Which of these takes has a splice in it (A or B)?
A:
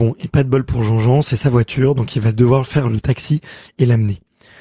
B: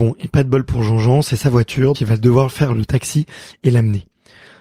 B